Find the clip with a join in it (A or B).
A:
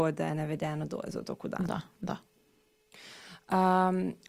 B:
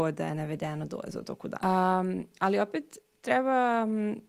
B